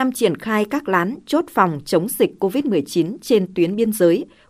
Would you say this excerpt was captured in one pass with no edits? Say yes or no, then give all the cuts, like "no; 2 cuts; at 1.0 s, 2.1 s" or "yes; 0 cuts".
yes; 0 cuts